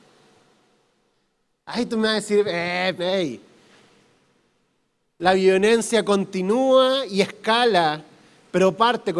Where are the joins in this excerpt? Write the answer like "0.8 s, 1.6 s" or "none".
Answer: 3.0 s